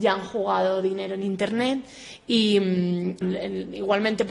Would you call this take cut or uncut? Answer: cut